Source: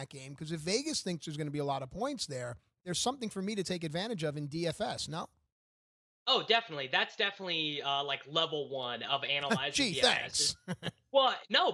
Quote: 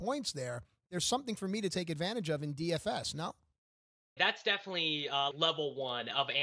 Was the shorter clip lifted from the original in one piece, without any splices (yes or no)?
no